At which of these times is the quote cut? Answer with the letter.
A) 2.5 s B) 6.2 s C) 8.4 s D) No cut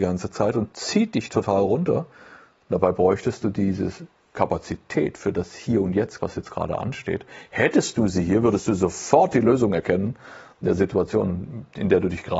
B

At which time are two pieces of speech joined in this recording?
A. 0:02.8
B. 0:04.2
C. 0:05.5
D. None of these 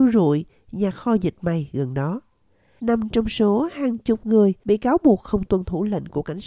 A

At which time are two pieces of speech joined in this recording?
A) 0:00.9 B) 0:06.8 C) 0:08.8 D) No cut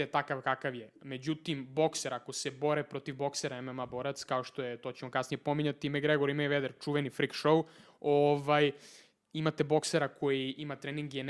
D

